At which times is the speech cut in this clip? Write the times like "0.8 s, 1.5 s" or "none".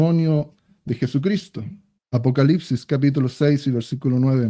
2.0 s